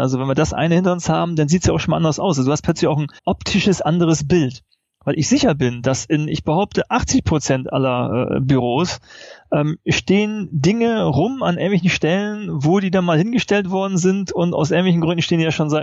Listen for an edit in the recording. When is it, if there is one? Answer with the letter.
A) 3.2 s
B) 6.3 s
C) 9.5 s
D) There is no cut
A